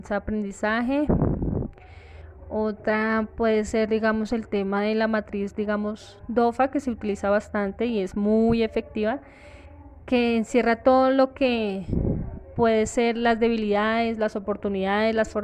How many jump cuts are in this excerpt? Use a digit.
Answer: 0